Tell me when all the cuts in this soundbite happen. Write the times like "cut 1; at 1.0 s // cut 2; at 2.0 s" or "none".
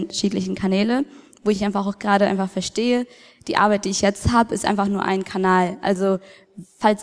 none

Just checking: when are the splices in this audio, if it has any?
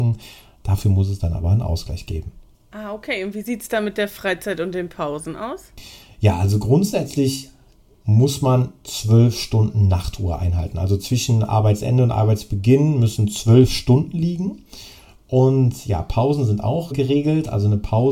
cut 1; at 16.9 s

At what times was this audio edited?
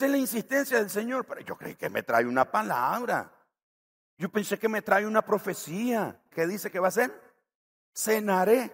cut 1; at 6.3 s

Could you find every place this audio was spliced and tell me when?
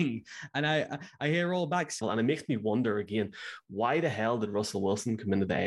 cut 1; at 2.0 s

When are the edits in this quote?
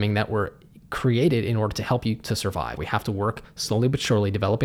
cut 1; at 2.8 s

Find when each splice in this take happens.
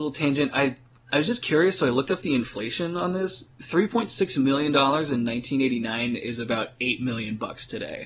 none

